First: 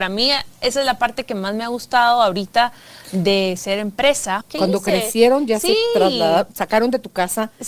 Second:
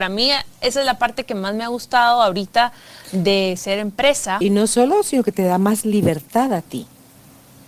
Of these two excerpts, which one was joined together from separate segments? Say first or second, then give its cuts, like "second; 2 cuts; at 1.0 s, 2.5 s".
first; 1 cut; at 4.4 s